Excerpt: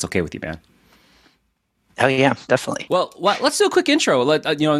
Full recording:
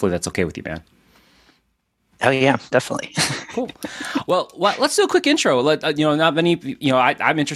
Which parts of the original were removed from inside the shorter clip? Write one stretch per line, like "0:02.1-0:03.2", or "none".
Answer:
0:03.1-0:04.2